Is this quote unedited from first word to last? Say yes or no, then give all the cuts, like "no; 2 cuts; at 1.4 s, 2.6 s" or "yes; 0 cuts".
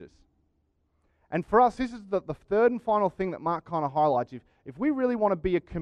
yes; 0 cuts